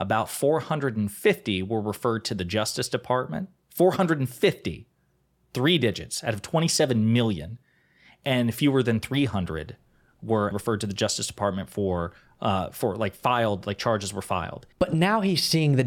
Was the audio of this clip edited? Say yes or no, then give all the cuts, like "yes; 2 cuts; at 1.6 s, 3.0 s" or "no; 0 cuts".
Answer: yes; 2 cuts; at 10.5 s, 14.7 s